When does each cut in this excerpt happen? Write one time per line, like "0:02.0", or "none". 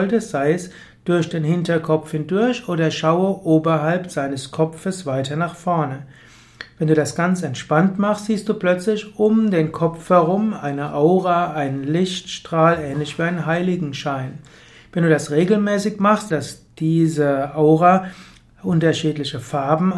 0:16.3

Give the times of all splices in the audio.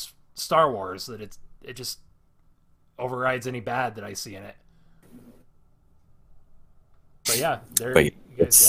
0:05.0

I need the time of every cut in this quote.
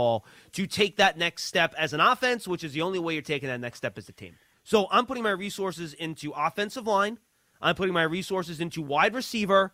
0:04.5

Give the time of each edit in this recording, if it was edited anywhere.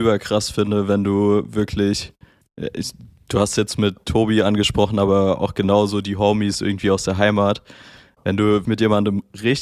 0:08.6

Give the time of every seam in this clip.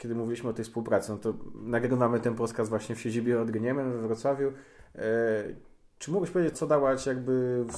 0:06.5

